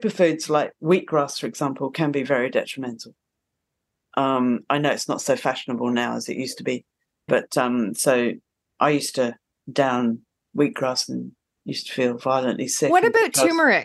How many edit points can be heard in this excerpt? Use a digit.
1